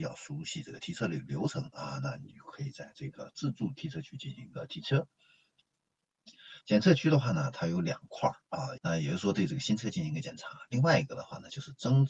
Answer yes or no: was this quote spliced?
yes